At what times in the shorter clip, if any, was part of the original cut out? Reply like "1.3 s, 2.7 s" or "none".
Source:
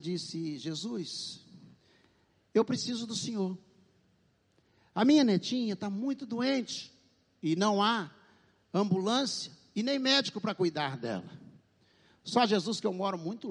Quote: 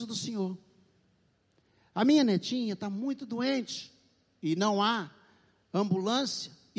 none

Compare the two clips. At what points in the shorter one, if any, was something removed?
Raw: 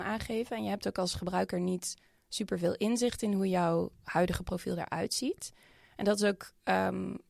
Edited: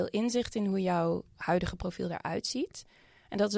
none

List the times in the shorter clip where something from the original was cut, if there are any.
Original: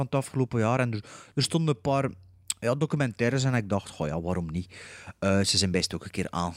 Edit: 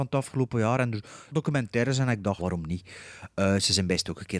1.3 s, 2.4 s

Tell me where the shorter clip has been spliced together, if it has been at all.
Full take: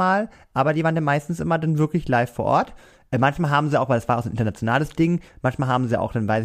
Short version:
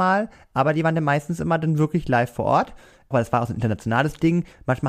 3.1 s

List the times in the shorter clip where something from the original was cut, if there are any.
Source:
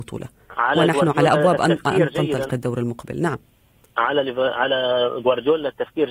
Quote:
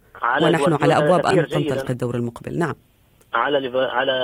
1.3 s

